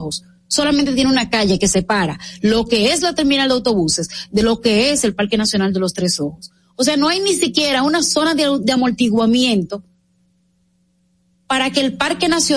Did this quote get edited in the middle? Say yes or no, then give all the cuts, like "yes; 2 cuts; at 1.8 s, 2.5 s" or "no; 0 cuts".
no; 0 cuts